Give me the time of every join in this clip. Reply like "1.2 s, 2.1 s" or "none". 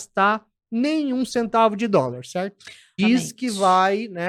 3.0 s